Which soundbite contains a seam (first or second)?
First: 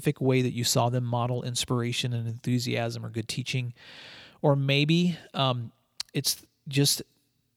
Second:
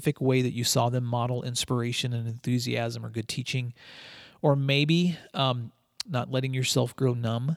second